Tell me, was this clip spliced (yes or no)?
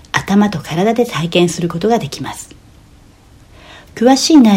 no